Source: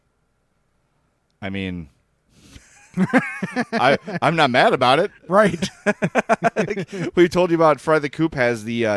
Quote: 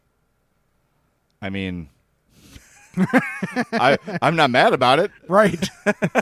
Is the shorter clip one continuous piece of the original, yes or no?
yes